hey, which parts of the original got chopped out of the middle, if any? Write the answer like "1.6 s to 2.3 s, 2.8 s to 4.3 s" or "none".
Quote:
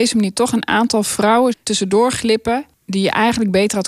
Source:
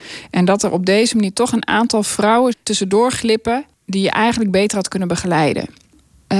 none